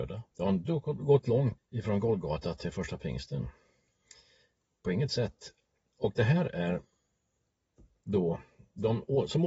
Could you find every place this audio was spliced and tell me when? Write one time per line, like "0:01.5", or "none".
0:01.6